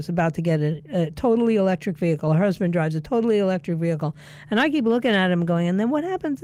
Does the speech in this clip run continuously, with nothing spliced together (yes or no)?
yes